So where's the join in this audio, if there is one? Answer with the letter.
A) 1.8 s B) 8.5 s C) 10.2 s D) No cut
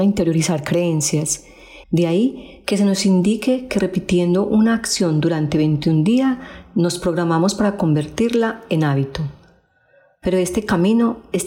A